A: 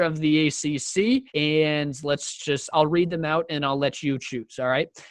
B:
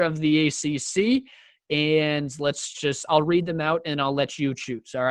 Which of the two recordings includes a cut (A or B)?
A